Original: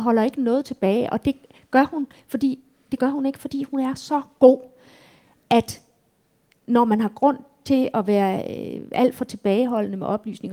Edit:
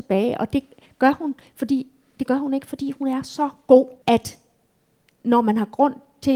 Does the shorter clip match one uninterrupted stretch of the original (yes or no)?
no